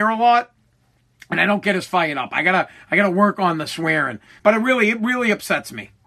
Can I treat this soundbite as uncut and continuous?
no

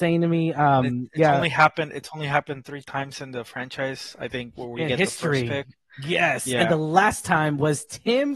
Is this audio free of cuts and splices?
yes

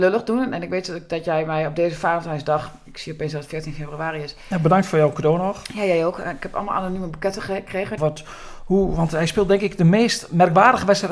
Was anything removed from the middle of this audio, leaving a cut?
yes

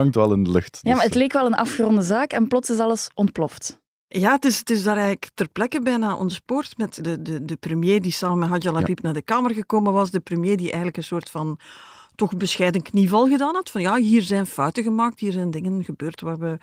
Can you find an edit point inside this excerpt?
yes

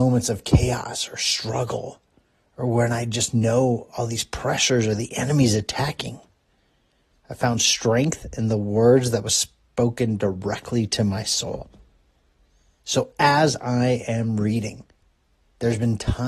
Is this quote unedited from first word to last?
no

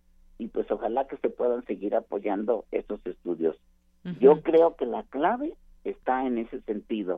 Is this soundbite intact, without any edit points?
yes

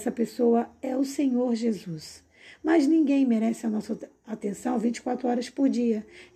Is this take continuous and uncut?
yes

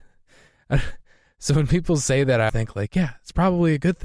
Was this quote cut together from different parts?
yes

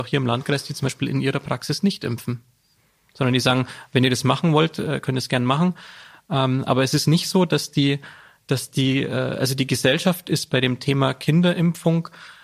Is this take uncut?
yes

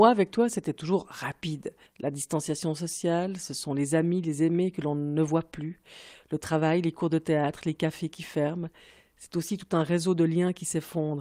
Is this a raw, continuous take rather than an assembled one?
no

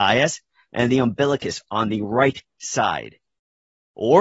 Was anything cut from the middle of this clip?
no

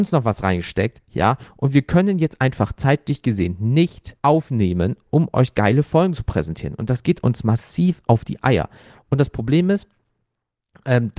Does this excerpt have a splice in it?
yes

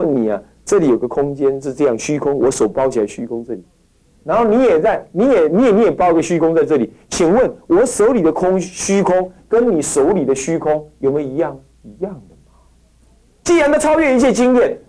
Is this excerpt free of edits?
no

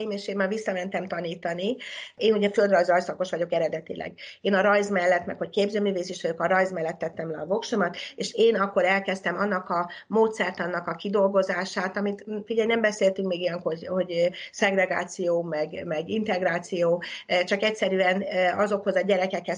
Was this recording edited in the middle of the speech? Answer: no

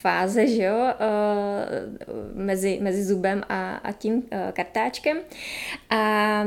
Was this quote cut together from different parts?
no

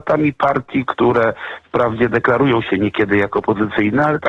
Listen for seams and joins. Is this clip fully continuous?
yes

